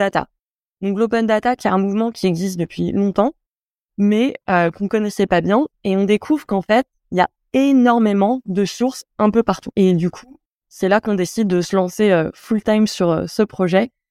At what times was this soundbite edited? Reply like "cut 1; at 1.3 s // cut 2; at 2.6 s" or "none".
cut 1; at 9.7 s

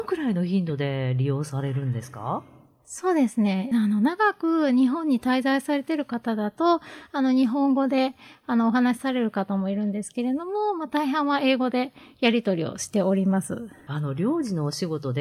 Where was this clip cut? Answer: cut 1; at 3.7 s

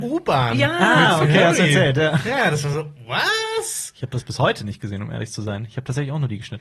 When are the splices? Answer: none

